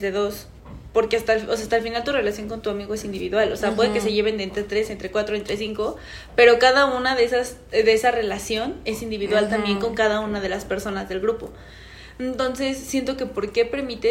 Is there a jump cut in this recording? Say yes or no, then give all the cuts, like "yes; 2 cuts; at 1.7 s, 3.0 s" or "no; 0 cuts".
no; 0 cuts